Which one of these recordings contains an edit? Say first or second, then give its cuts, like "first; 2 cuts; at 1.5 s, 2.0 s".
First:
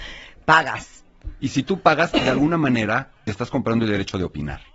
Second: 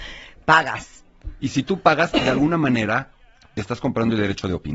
first; 1 cut; at 3.2 s